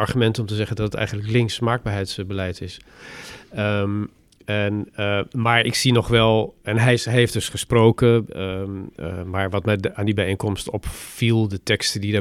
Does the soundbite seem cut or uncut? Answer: uncut